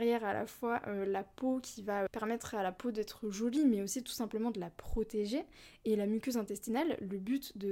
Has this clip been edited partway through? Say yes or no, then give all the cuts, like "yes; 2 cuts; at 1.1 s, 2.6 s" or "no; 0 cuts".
yes; 1 cut; at 2.1 s